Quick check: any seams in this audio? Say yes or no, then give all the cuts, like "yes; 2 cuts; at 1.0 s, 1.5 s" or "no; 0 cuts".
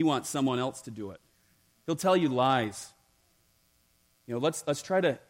yes; 1 cut; at 4.1 s